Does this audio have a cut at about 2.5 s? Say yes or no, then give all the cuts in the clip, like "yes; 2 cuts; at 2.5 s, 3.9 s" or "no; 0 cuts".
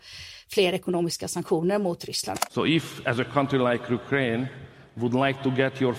yes; 1 cut; at 2.5 s